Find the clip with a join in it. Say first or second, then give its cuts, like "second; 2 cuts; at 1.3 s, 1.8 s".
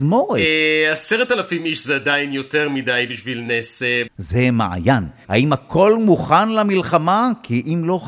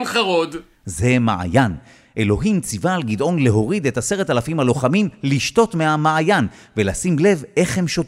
first; 2 cuts; at 4.1 s, 5.2 s